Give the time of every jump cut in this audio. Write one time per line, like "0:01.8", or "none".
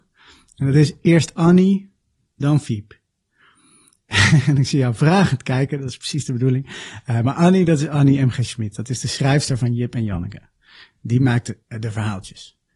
none